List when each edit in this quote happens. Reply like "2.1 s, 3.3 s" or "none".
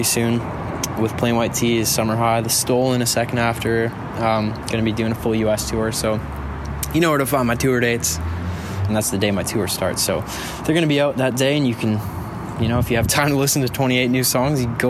8.9 s